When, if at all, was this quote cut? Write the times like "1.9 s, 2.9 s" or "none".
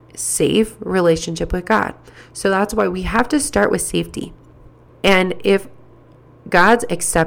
4.9 s